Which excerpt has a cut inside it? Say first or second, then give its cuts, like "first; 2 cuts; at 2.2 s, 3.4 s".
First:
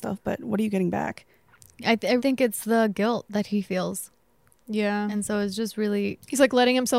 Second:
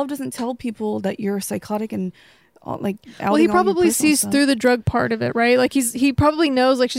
first; 2 cuts; at 2.2 s, 4.6 s